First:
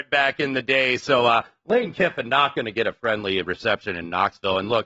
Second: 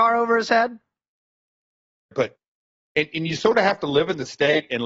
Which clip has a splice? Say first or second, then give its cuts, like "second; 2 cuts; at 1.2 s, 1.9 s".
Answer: second; 1 cut; at 2.1 s